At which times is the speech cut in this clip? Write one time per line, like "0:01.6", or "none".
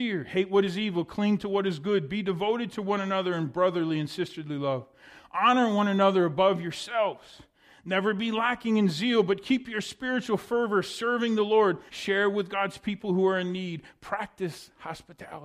0:11.9